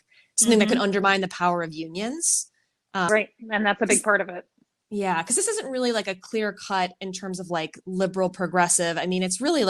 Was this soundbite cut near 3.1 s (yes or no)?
yes